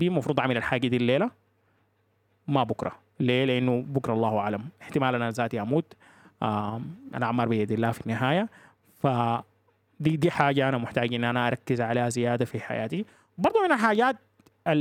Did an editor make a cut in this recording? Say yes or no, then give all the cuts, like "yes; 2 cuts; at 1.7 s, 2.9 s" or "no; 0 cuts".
no; 0 cuts